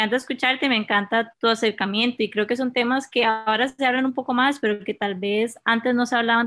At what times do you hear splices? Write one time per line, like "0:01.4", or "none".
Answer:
0:01.3